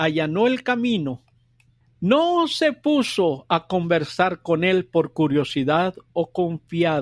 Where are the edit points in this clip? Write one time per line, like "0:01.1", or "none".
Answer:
0:01.8